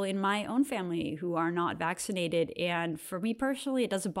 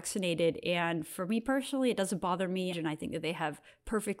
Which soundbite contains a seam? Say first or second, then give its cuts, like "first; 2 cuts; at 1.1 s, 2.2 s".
second; 1 cut; at 2.7 s